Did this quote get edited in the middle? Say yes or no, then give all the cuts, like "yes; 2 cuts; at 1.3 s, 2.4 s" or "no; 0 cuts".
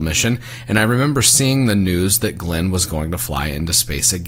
no; 0 cuts